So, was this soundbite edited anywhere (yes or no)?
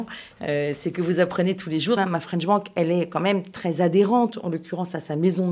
yes